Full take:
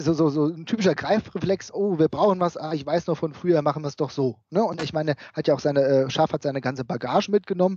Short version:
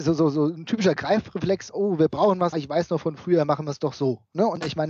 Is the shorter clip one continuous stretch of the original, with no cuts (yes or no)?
no